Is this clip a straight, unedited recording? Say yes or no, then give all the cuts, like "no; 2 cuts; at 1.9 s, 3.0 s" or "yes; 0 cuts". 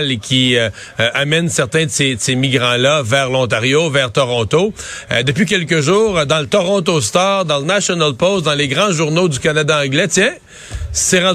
yes; 0 cuts